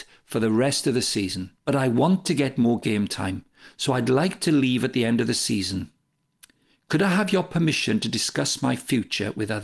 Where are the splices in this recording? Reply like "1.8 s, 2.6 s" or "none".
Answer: none